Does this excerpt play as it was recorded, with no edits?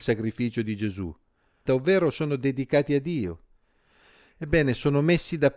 no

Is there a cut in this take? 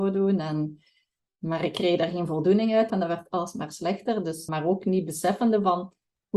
yes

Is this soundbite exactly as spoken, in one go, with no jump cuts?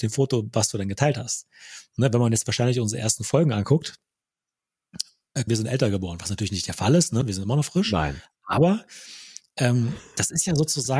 no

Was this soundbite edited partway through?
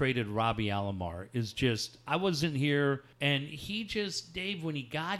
yes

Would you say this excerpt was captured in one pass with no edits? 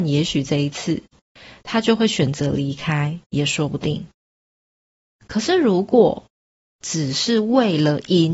no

